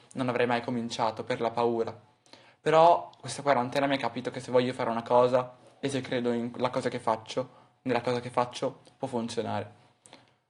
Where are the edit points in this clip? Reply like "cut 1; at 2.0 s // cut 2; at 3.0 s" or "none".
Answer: cut 1; at 3.2 s